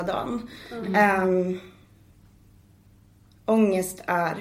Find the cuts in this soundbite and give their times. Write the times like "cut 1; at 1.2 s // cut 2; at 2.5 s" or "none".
none